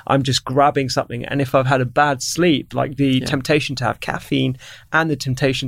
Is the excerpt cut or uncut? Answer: cut